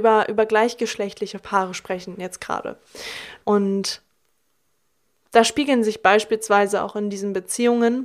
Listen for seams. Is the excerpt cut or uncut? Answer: cut